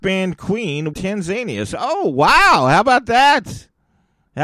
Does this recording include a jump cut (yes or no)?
yes